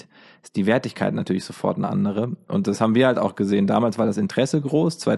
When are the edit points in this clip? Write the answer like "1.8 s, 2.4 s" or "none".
none